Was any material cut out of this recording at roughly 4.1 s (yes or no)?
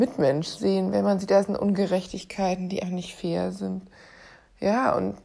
no